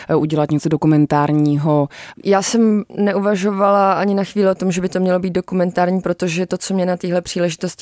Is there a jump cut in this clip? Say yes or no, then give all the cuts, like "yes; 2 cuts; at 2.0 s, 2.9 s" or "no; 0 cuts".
yes; 1 cut; at 2.2 s